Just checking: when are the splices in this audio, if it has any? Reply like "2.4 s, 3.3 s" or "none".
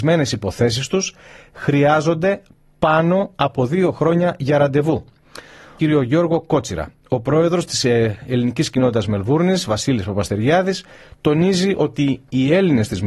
5.8 s